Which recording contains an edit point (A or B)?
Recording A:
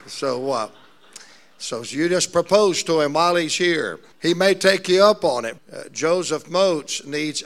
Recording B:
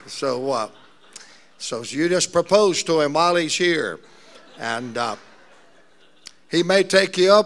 A